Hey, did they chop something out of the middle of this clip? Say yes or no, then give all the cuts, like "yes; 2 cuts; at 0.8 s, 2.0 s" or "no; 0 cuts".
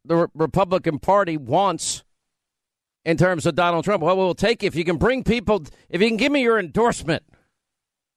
no; 0 cuts